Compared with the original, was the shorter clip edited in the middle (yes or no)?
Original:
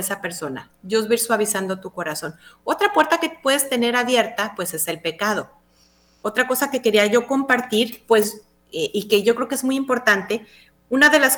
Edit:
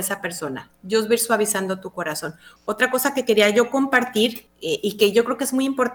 yes